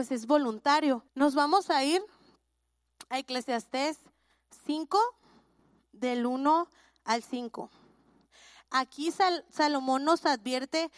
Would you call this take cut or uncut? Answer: cut